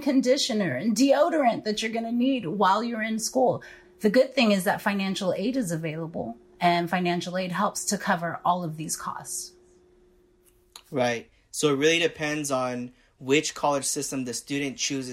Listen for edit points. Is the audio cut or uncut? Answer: cut